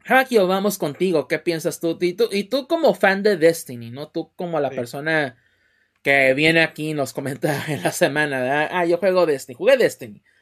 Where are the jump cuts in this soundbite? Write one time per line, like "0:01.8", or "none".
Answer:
none